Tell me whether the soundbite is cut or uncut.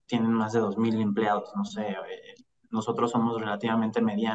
uncut